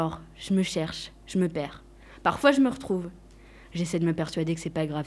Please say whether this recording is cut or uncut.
cut